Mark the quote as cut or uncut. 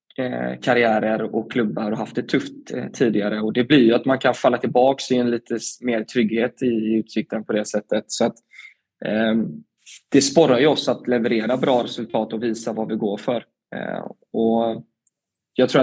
uncut